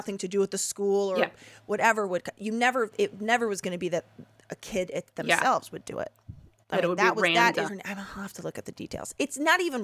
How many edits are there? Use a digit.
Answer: 1